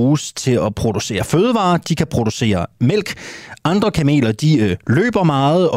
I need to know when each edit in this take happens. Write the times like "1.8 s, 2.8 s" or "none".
none